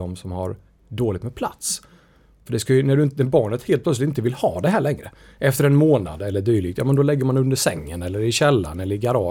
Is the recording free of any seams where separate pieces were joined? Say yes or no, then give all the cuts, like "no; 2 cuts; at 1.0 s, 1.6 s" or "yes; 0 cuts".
yes; 0 cuts